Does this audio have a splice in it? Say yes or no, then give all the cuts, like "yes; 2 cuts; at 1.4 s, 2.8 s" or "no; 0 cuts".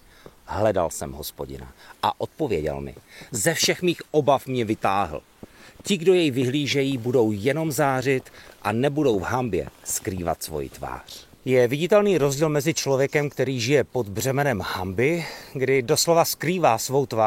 no; 0 cuts